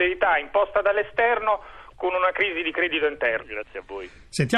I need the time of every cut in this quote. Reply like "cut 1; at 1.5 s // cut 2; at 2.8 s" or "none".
cut 1; at 3.4 s